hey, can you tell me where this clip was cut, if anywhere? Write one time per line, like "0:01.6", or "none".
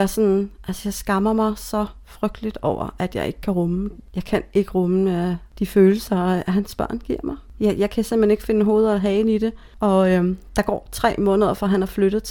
none